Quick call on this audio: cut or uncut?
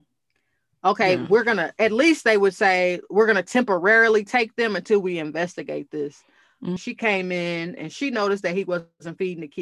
cut